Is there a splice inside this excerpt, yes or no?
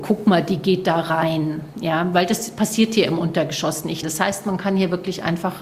yes